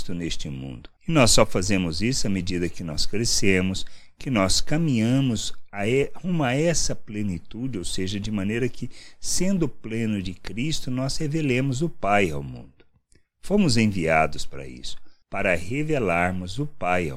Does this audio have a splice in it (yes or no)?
no